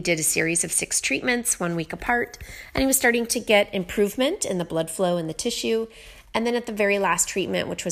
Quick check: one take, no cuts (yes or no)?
yes